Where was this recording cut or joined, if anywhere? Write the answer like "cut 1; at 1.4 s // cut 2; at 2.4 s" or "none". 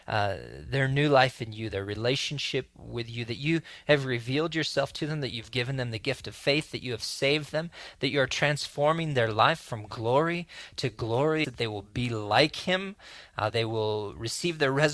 cut 1; at 11.4 s // cut 2; at 13.5 s